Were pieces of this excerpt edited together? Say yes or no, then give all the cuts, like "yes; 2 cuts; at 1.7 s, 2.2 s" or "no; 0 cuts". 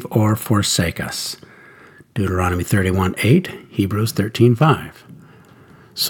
no; 0 cuts